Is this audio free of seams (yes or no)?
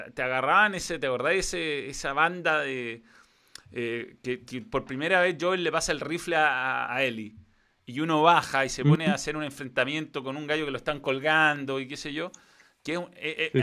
no